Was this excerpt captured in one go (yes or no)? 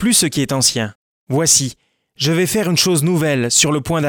yes